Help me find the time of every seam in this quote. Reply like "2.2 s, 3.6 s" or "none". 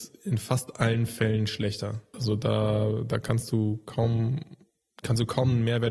2.1 s